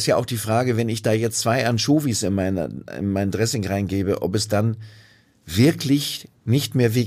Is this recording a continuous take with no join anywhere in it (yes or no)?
yes